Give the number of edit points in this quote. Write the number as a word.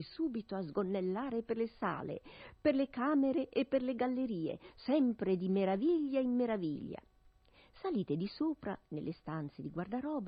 zero